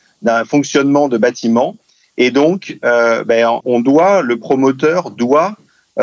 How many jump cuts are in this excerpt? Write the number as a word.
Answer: one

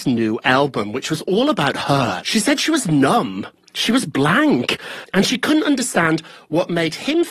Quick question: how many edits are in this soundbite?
one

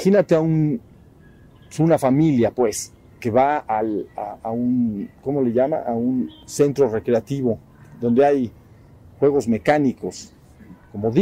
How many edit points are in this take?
zero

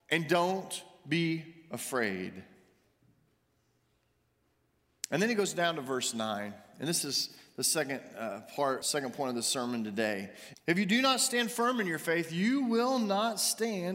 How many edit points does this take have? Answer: two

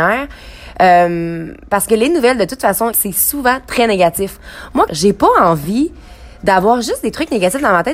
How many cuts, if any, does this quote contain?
two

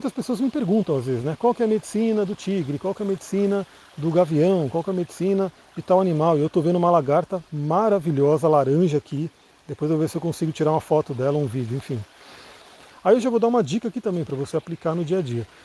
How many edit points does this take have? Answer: two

